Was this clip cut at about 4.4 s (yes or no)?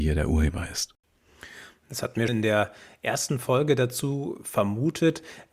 no